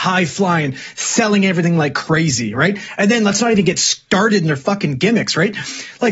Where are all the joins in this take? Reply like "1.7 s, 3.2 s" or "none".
none